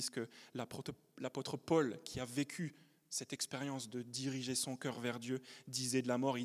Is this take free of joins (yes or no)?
yes